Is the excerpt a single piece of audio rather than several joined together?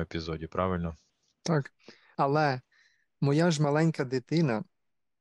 no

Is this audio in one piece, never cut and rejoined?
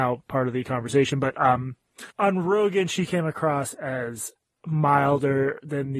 no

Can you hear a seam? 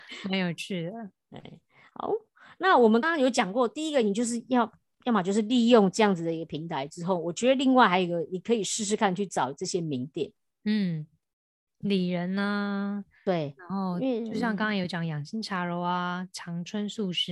yes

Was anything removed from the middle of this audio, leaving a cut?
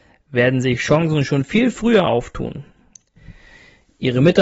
no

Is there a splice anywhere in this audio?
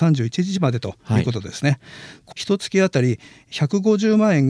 yes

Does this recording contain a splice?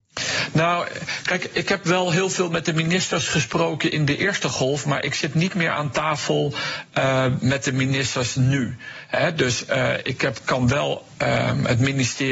no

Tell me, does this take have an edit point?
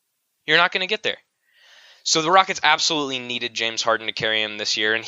no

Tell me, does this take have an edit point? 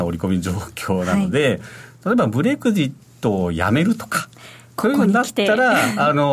no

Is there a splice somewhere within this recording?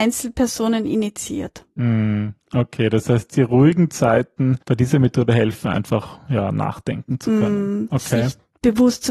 yes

